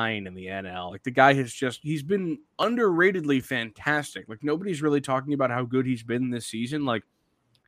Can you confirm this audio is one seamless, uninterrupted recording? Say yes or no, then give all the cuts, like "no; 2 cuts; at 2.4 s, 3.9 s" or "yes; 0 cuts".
yes; 0 cuts